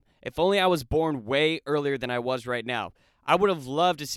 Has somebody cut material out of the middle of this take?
no; 0 cuts

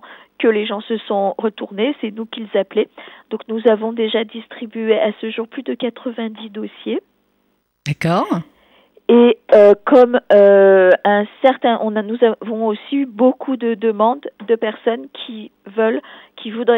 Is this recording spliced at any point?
no; 0 cuts

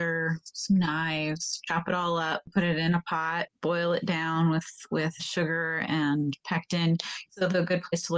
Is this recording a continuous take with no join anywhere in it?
no; 2 cuts; at 5.2 s, 7.2 s

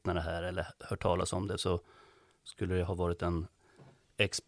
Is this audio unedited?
yes; 0 cuts

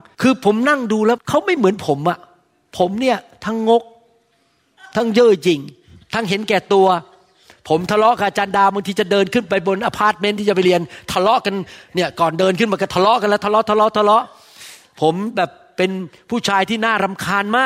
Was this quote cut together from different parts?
no; 0 cuts

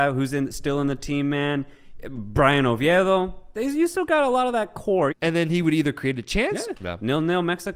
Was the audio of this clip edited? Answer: yes; 2 cuts; at 5.1 s, 6.7 s

